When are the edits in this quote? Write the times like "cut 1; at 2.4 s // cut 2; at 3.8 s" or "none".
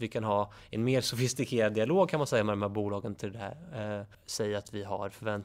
cut 1; at 4.1 s